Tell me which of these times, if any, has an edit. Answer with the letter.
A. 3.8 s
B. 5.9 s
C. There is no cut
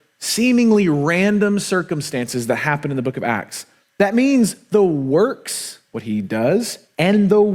A